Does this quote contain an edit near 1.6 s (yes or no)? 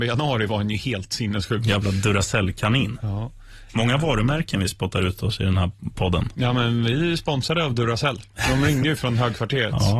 no